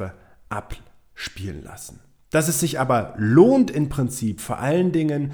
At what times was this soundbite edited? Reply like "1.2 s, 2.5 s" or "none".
none